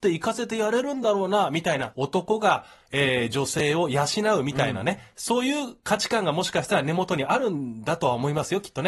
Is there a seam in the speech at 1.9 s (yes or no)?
yes